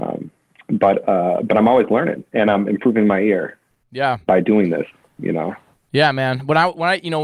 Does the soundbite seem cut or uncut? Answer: uncut